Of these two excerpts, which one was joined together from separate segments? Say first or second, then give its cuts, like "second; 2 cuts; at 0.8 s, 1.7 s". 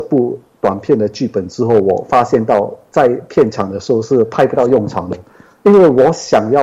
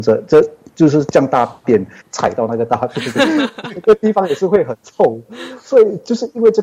second; 1 cut; at 2.0 s